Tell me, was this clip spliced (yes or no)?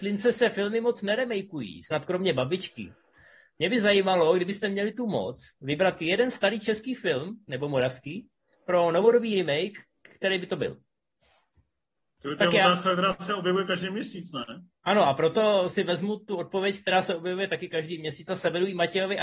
no